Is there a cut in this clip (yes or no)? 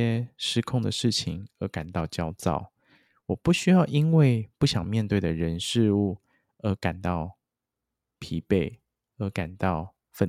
no